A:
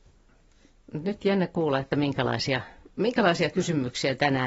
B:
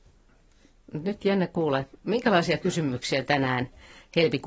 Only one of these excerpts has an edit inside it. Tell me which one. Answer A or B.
B